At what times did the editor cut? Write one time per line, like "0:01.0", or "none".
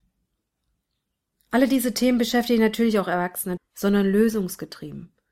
0:03.6